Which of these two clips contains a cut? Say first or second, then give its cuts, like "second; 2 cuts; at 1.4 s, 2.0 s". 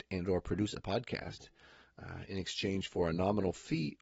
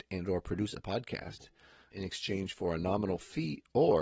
second; 1 cut; at 1.9 s